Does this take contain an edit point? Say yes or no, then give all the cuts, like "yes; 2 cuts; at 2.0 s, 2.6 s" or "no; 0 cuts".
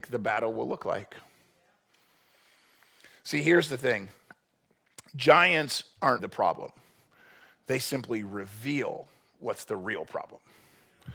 yes; 1 cut; at 6.2 s